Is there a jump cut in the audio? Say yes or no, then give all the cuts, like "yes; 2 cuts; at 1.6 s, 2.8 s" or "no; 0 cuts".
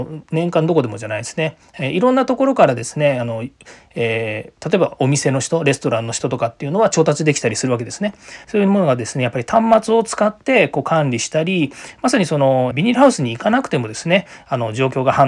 yes; 2 cuts; at 8.4 s, 12.7 s